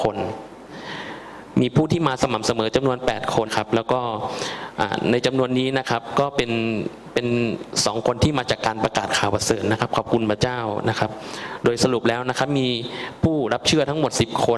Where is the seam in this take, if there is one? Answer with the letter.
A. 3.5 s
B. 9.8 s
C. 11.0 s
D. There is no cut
A